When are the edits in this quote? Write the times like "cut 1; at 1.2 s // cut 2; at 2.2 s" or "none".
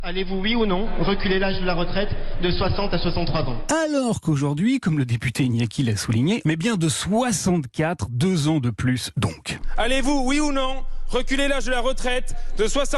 cut 1; at 6.4 s